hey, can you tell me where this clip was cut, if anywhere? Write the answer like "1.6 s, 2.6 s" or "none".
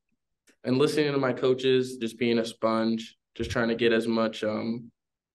2.0 s